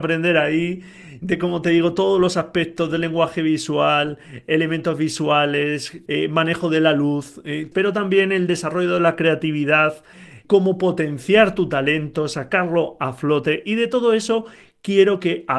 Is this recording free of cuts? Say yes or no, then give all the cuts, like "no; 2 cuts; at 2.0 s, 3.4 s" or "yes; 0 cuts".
no; 3 cuts; at 1.2 s, 6.1 s, 7.7 s